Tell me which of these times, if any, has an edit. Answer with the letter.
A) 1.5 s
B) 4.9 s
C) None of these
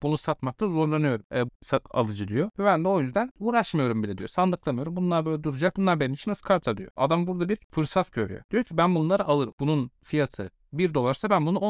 A